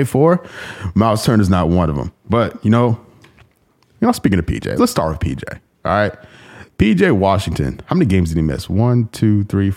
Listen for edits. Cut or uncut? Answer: cut